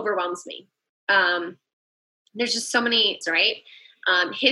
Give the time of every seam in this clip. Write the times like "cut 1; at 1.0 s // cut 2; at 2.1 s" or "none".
cut 1; at 3.2 s